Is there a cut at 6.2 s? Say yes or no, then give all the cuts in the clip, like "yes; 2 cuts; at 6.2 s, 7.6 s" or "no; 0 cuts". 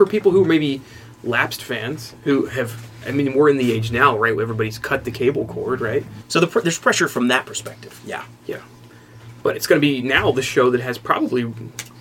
yes; 1 cut; at 6.2 s